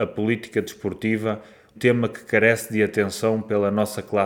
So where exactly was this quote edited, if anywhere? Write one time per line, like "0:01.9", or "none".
0:01.7